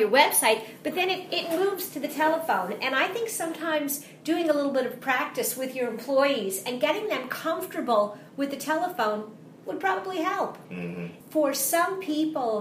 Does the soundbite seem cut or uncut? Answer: cut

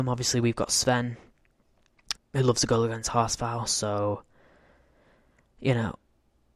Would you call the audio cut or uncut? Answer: cut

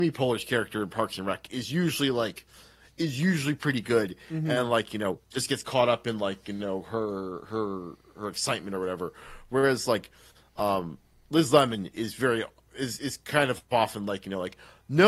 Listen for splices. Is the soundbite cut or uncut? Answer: uncut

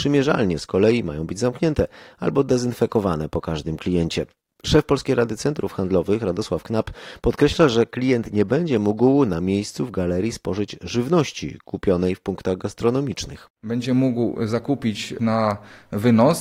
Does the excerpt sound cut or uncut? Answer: uncut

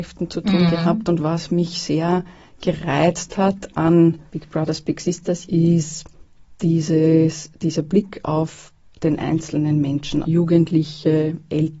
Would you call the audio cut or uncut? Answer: cut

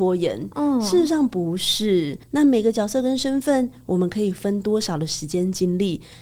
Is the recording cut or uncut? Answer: cut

